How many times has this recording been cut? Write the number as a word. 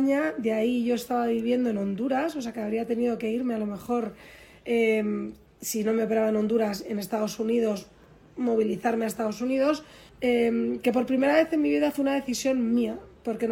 one